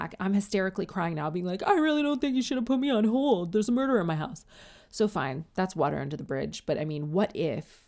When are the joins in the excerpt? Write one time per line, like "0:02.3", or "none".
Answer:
none